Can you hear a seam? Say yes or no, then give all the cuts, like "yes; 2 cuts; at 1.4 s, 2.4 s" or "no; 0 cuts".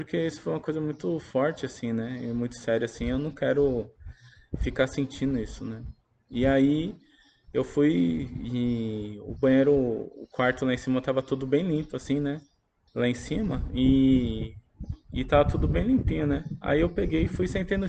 yes; 1 cut; at 12.9 s